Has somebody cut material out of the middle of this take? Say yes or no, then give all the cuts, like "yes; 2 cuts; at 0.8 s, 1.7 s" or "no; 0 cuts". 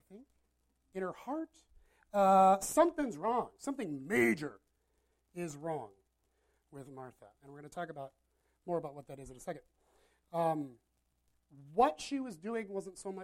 no; 0 cuts